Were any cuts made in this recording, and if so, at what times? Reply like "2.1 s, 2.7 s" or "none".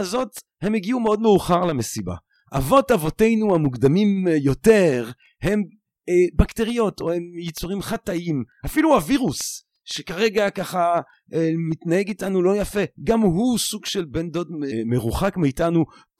14.7 s